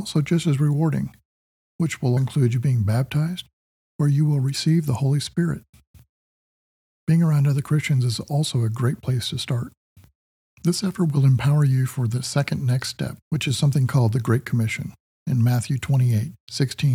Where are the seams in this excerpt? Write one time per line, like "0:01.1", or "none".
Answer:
0:02.2
0:13.2